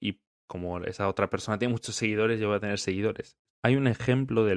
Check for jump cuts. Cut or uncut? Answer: cut